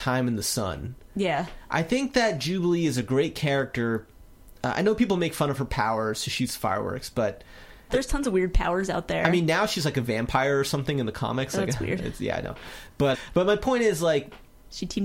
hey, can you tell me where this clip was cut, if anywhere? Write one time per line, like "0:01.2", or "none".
0:07.9
0:13.1

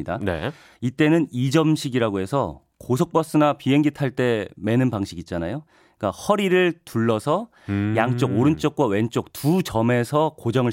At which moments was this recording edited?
none

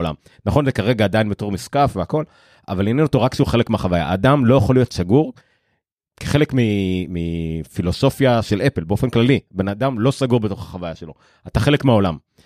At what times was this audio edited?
none

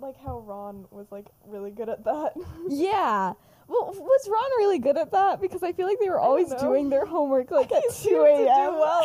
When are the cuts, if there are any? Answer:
none

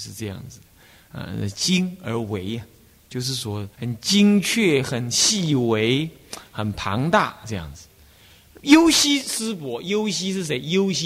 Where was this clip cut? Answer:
0:03.7

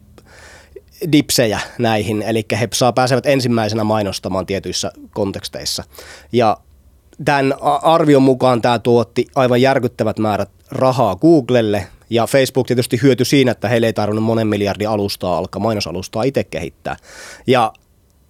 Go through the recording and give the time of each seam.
none

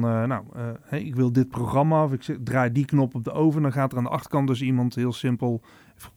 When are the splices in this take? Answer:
none

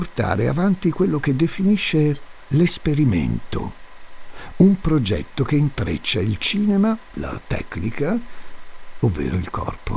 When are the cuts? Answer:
0:07.2
0:09.0

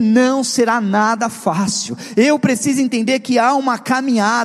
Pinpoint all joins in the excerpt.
none

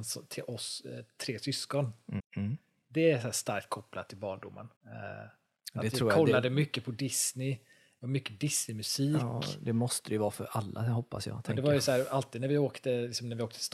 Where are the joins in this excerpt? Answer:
0:02.2
0:04.8

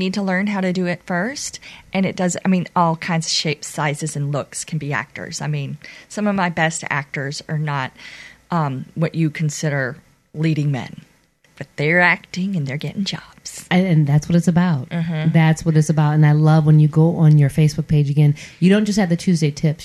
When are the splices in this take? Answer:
none

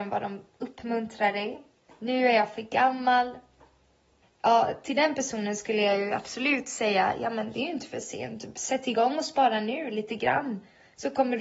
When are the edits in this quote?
0:01.9
0:04.2

